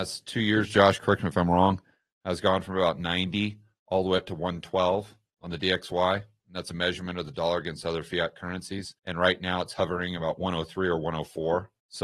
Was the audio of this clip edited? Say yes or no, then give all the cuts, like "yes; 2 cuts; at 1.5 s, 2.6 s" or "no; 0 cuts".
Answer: yes; 1 cut; at 9.0 s